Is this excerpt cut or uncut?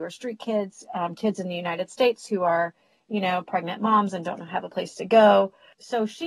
uncut